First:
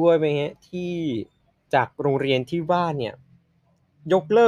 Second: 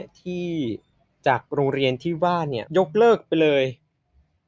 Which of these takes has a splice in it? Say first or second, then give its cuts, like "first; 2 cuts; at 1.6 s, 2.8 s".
second; 1 cut; at 2.6 s